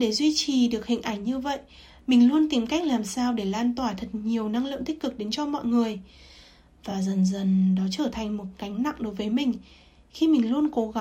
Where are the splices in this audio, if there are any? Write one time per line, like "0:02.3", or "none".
none